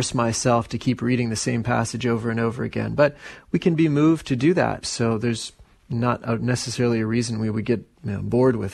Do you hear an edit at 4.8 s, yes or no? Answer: yes